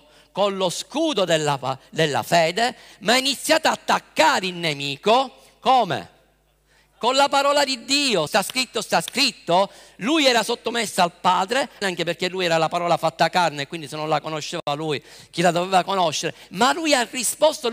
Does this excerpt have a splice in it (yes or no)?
yes